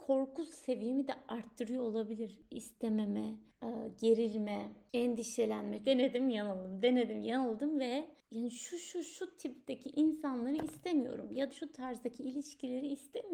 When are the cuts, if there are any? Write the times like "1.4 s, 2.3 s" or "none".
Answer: 5.8 s, 11.5 s